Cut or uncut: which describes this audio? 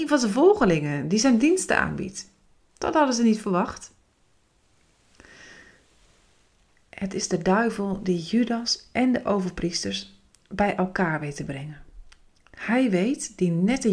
uncut